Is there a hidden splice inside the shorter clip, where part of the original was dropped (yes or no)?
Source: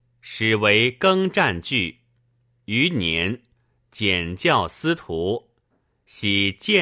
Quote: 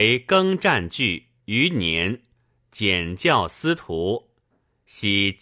yes